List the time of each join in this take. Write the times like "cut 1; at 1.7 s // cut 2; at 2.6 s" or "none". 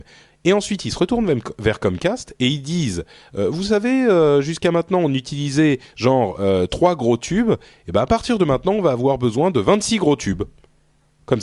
none